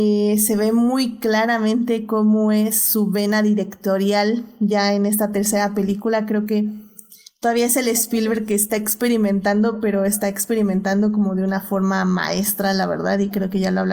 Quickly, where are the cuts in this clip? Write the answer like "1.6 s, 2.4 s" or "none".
none